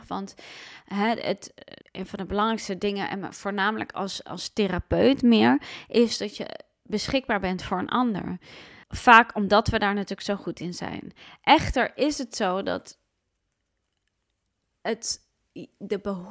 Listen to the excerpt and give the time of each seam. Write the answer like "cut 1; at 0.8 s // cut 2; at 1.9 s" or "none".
cut 1; at 1.8 s // cut 2; at 8.8 s